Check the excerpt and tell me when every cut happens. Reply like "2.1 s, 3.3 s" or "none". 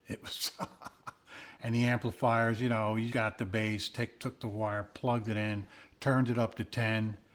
3.1 s